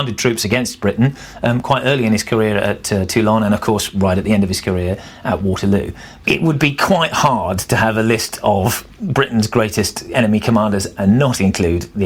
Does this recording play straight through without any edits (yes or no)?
no